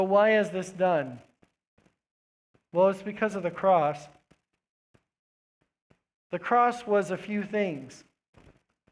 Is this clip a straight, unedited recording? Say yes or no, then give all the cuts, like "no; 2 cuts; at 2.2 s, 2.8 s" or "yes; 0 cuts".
yes; 0 cuts